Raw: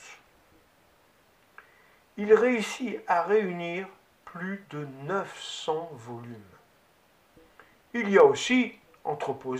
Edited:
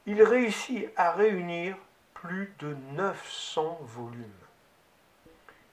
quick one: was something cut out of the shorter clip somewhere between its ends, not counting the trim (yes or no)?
no